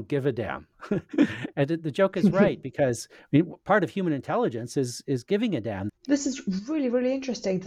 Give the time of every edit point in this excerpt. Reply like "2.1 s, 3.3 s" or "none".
1.5 s, 5.9 s